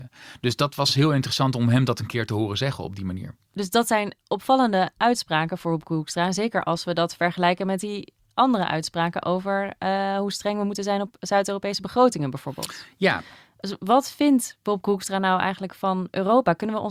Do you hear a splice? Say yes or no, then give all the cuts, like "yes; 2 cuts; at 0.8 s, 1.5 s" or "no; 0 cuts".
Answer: no; 0 cuts